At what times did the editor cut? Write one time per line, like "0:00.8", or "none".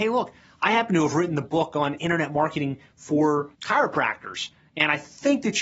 0:03.5